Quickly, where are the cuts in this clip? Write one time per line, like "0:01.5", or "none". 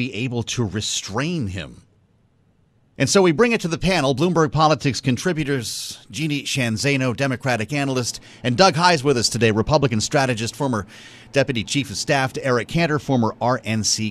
0:02.9